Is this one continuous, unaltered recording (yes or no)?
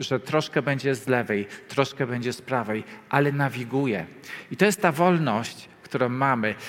yes